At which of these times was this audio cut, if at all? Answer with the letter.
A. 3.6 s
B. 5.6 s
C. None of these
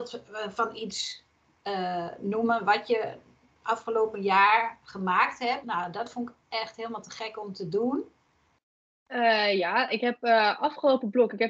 B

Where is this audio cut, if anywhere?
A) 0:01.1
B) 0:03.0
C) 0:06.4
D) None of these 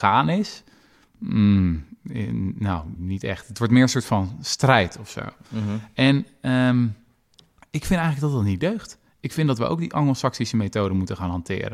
B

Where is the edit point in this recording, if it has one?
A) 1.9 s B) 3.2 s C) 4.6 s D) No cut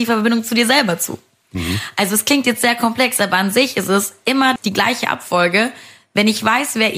C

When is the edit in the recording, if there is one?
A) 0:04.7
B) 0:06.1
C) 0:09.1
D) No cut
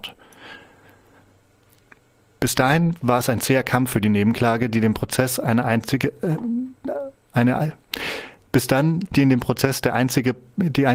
C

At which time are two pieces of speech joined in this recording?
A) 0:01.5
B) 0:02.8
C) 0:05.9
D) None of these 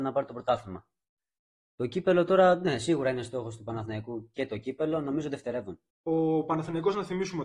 C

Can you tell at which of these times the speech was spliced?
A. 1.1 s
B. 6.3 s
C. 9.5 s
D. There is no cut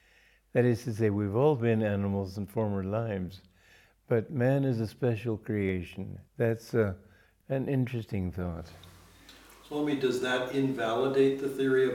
B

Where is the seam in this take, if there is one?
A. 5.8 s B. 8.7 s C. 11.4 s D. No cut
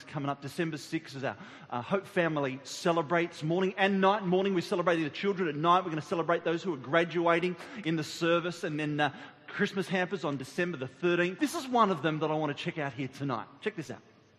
C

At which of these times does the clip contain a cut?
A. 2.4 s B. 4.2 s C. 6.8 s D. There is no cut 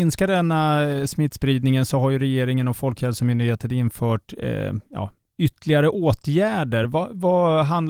D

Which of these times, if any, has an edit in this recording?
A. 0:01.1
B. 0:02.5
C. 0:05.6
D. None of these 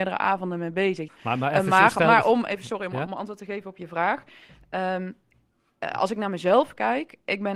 A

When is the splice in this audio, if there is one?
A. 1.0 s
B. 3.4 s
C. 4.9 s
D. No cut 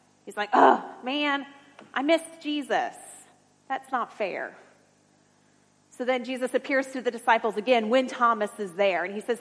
D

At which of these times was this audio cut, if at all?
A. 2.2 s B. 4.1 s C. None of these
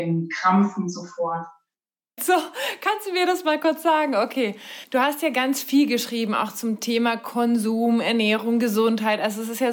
A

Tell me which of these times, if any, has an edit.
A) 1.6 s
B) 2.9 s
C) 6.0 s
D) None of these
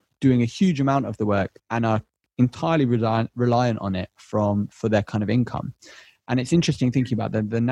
A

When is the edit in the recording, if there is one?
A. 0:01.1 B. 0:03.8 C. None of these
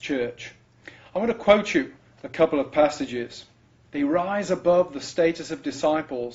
B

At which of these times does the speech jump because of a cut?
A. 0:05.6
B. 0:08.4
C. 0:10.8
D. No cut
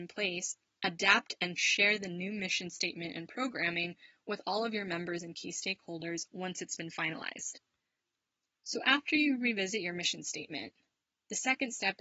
D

